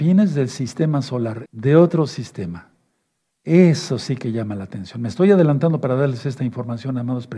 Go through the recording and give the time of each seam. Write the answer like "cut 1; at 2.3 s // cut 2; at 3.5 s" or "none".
cut 1; at 1.5 s